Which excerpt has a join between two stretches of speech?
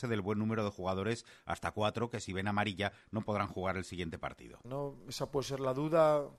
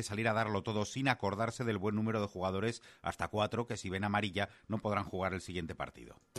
first; 1 cut; at 4.6 s

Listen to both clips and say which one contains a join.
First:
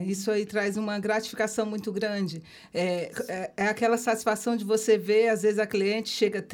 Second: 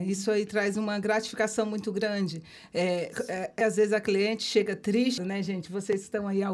second; 2 cuts; at 3.6 s, 5.2 s

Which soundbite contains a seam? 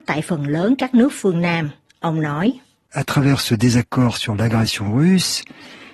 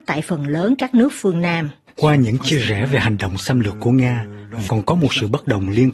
second; 2 cuts; at 1.9 s, 4.7 s

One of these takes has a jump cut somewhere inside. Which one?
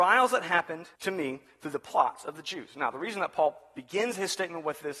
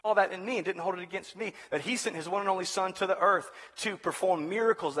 first; 1 cut; at 1.0 s

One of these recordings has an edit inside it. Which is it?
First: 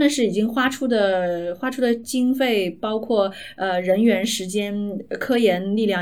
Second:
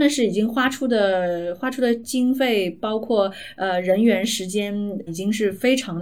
second; 1 cut; at 5.1 s

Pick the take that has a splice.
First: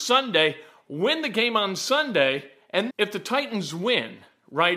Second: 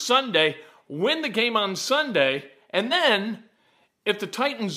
first; 1 cut; at 2.9 s

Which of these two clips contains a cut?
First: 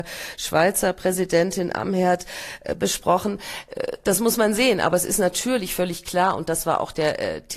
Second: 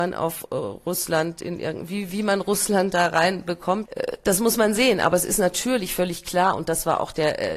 second; 1 cut; at 3.9 s

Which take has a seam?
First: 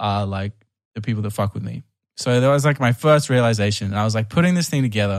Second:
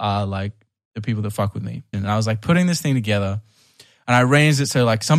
second; 1 cut; at 1.9 s

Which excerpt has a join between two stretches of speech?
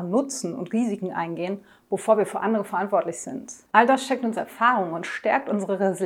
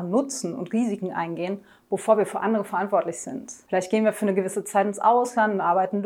first; 1 cut; at 3.7 s

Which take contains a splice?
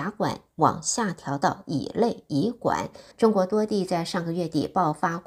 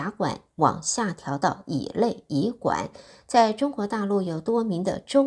first; 1 cut; at 3.1 s

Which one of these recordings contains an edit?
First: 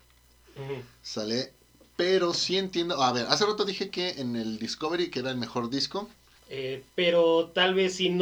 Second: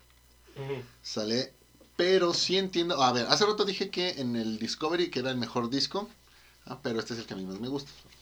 first; 1 cut; at 6.4 s

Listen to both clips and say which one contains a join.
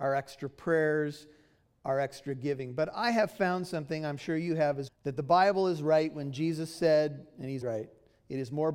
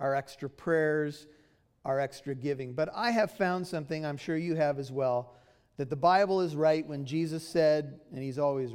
first; 2 cuts; at 4.9 s, 7.6 s

